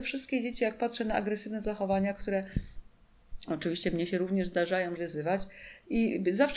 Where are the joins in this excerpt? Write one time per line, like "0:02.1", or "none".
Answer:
0:05.0